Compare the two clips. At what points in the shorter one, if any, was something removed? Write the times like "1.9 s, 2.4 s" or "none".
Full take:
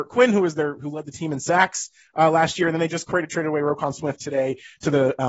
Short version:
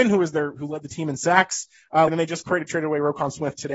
2.1 s